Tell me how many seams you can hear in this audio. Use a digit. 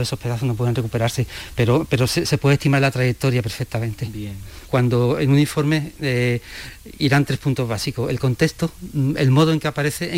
0